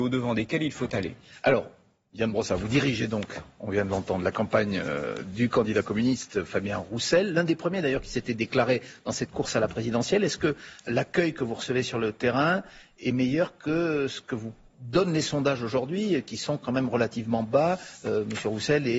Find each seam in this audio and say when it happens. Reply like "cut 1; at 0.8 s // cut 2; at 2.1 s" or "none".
none